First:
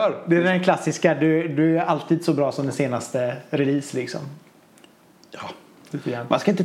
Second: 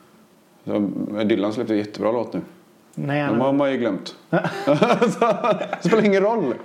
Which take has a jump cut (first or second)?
second